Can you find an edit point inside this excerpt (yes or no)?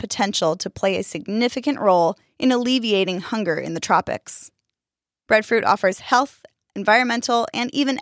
yes